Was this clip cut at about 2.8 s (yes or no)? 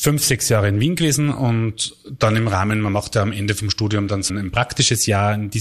no